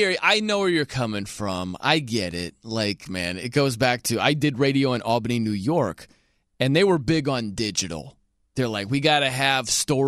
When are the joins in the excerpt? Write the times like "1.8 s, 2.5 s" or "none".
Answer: 3.0 s